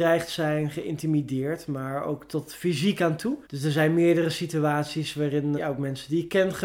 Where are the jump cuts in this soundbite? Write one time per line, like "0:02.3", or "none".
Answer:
0:03.4
0:05.6